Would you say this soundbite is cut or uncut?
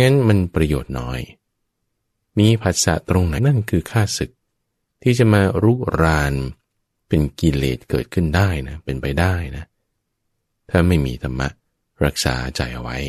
cut